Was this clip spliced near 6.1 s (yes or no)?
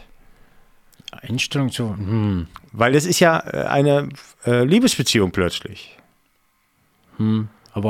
no